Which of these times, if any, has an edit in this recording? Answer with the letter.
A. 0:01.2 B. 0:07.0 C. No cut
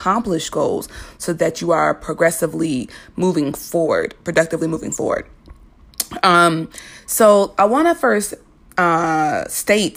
C